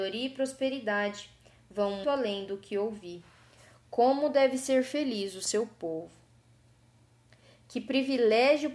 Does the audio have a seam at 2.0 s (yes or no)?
yes